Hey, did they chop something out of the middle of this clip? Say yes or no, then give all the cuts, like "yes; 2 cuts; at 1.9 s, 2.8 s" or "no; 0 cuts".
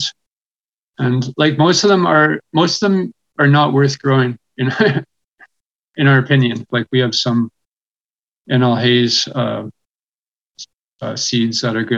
yes; 1 cut; at 6.7 s